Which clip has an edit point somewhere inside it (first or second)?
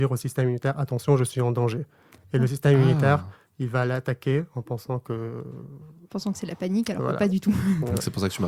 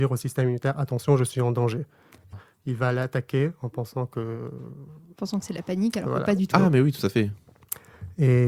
second